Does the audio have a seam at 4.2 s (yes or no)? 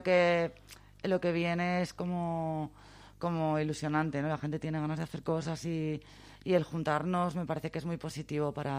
no